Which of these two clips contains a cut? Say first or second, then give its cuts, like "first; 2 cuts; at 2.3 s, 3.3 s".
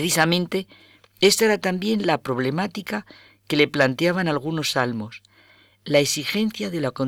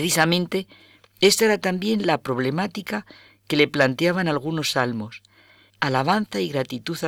second; 1 cut; at 5.7 s